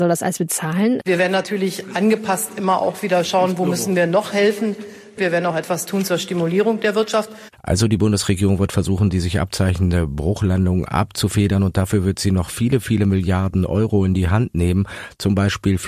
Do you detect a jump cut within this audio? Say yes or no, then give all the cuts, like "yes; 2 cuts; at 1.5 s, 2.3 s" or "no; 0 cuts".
yes; 2 cuts; at 1.0 s, 5.2 s